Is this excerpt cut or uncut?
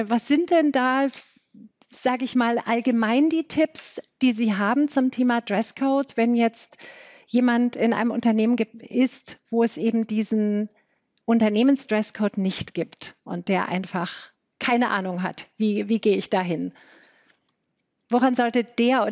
uncut